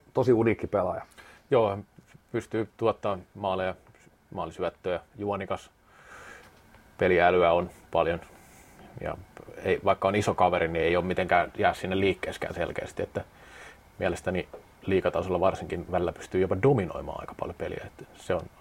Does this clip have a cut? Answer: no; 0 cuts

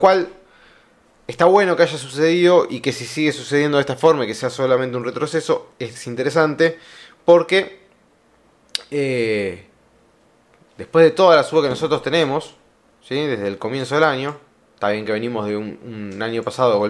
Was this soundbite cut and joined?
no; 0 cuts

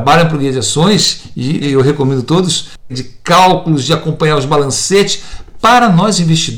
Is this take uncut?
no; 2 cuts; at 1.6 s, 2.9 s

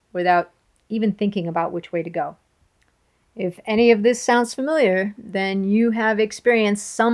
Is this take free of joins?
yes; 0 cuts

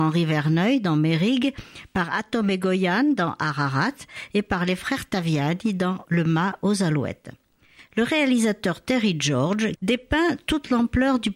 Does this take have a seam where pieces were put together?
yes; 1 cut; at 9.8 s

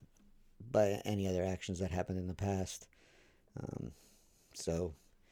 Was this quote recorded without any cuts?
yes; 0 cuts

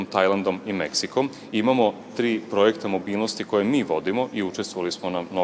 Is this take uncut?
yes; 0 cuts

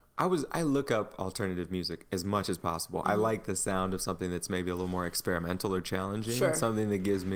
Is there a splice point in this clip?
no; 0 cuts

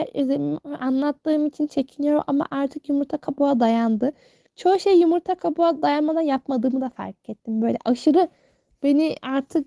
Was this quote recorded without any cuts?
yes; 0 cuts

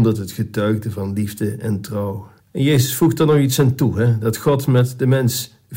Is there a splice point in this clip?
yes; 1 cut; at 2.4 s

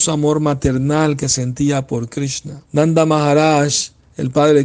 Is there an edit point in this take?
yes; 1 cut; at 2.7 s

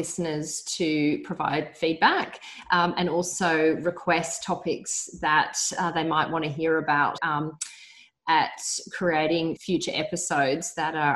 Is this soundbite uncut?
no; 2 cuts; at 7.2 s, 9.6 s

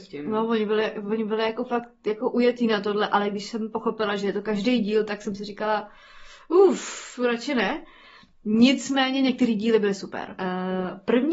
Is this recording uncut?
no; 1 cut; at 10.4 s

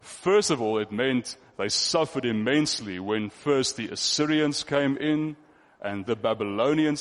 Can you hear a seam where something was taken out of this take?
yes; 1 cut; at 6.1 s

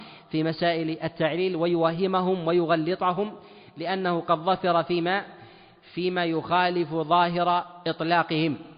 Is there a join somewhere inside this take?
no; 0 cuts

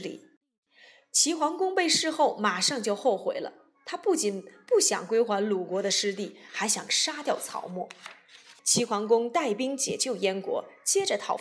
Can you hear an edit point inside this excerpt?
yes; 1 cut; at 8.6 s

